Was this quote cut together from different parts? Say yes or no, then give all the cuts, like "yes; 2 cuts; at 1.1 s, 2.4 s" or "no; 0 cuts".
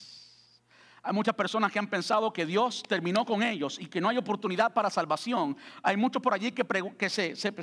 no; 0 cuts